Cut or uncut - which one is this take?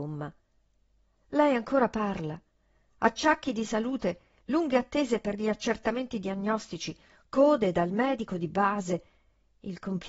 cut